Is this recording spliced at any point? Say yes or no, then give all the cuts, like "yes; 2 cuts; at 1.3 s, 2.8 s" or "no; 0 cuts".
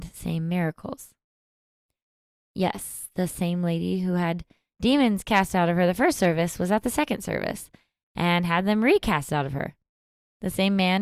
no; 0 cuts